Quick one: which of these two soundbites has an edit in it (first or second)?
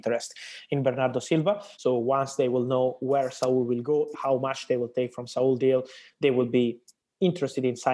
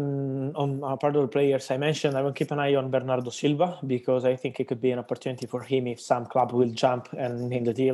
first